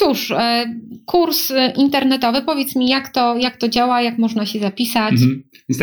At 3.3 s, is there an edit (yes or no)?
no